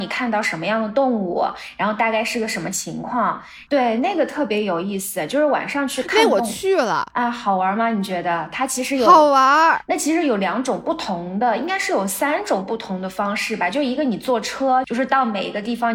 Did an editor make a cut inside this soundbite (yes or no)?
yes